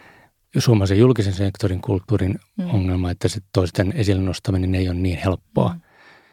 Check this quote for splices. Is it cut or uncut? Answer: uncut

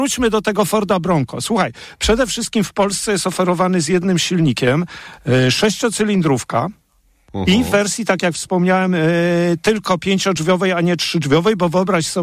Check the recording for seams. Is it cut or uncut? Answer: uncut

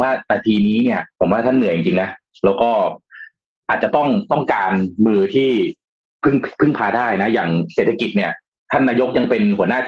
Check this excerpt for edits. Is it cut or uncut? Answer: cut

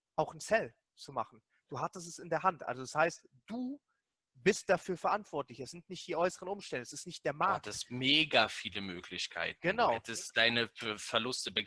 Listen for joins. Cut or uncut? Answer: uncut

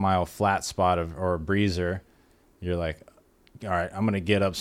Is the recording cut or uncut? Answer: uncut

